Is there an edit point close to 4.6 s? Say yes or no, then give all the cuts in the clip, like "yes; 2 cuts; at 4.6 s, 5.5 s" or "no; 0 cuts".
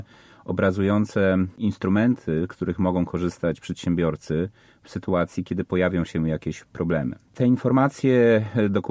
no; 0 cuts